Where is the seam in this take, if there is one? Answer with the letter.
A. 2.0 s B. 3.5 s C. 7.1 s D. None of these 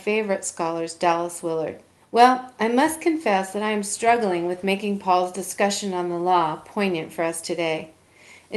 A